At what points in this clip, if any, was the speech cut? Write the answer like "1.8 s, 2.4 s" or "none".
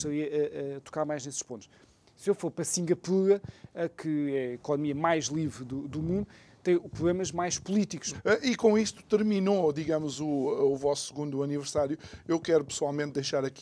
8.1 s